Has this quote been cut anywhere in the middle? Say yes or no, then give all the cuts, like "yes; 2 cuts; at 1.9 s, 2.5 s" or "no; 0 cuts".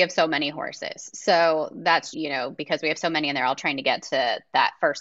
yes; 1 cut; at 2.1 s